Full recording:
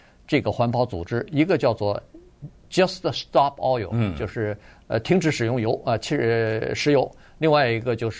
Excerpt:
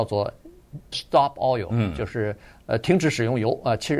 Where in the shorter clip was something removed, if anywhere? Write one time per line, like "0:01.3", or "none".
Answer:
0:00.9

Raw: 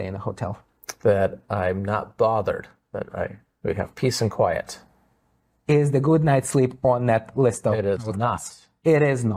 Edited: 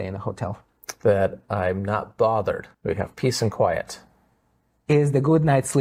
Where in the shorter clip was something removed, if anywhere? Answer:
0:02.7

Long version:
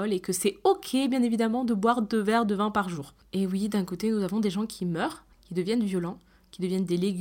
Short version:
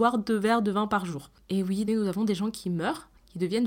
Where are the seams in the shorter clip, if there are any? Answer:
0:01.9

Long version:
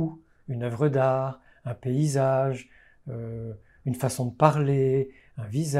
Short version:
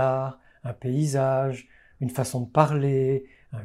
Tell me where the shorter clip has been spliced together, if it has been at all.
0:01.9

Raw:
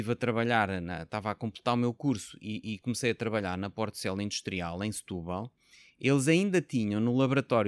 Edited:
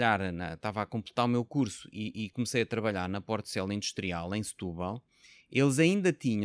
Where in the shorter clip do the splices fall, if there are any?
none

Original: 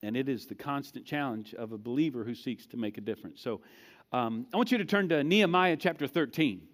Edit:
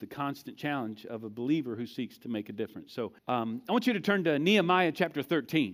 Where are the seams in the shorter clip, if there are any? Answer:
0:03.2

